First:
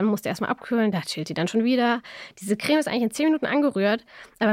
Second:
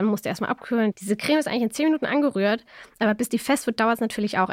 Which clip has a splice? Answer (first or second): second